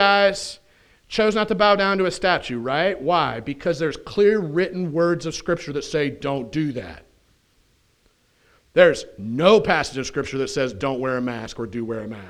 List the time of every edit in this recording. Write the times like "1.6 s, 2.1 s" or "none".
none